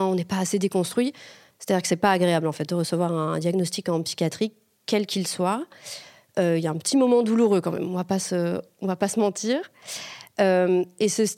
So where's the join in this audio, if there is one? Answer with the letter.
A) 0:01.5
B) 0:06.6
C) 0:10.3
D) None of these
A